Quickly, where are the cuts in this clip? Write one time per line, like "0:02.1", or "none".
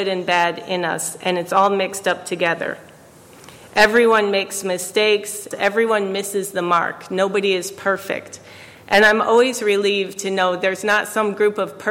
0:05.5